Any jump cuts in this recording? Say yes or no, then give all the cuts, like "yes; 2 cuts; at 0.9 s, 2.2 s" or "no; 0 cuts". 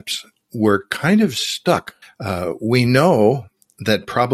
yes; 1 cut; at 2.0 s